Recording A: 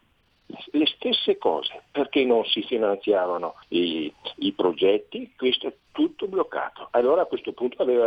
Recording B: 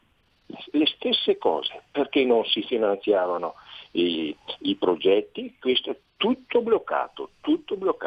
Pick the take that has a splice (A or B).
A